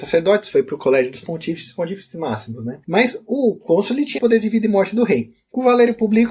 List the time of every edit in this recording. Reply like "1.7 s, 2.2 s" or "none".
4.2 s